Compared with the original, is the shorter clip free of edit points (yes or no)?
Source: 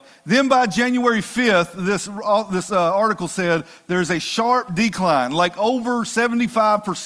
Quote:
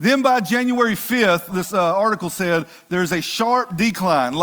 no